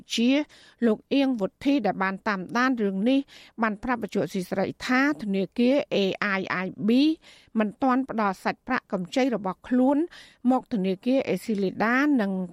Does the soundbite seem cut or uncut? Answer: uncut